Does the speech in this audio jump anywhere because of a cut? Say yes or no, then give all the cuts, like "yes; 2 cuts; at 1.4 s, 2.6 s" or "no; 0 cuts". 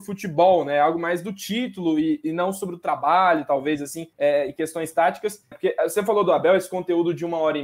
yes; 2 cuts; at 4.1 s, 5.5 s